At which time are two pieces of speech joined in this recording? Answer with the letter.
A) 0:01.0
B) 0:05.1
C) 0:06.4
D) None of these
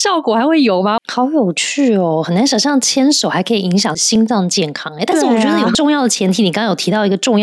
A